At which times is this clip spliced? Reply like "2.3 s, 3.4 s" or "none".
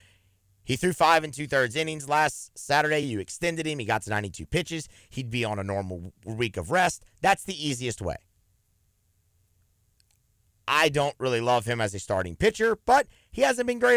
none